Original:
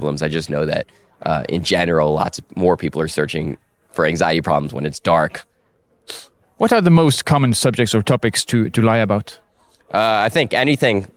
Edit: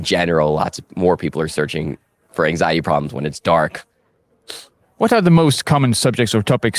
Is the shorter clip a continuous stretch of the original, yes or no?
yes